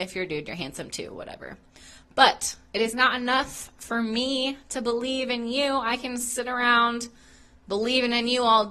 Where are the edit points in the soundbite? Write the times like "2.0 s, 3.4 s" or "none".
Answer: none